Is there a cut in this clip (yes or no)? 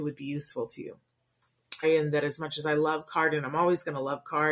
yes